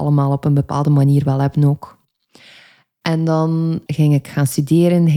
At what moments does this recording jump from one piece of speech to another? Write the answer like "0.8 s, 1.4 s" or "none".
3.9 s